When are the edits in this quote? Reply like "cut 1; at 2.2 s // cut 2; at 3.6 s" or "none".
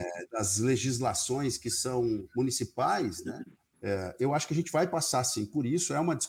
cut 1; at 3.7 s